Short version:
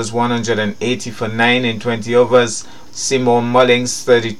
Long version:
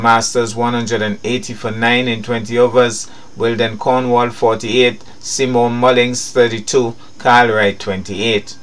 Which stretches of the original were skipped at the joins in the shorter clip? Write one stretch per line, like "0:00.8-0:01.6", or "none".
0:03.3-0:05.1